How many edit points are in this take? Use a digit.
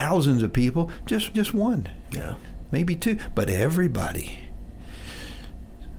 1